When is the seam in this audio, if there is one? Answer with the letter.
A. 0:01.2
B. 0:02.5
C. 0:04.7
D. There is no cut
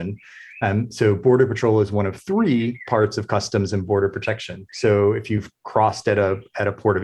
C